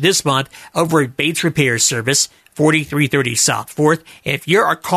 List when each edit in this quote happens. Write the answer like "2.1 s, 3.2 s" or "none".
none